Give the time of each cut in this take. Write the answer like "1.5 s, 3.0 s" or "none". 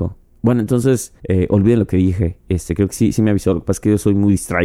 1.2 s